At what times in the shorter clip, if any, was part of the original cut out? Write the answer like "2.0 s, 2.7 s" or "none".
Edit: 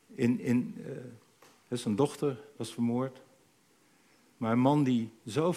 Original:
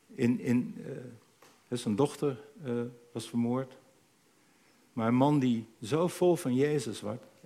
2.6 s